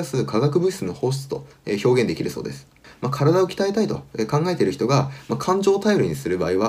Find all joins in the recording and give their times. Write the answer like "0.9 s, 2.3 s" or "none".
none